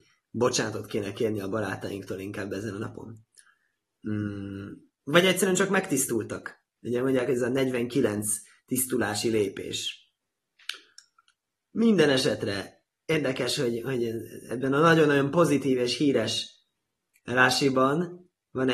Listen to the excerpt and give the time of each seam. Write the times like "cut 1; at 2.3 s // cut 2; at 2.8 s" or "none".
none